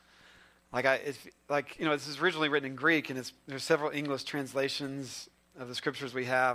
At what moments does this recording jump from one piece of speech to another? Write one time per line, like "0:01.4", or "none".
none